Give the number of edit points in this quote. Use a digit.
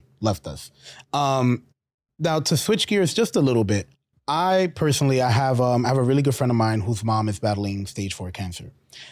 0